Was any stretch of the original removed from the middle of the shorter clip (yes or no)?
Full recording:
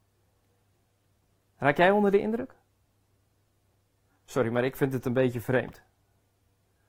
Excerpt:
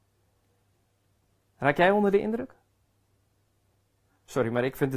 no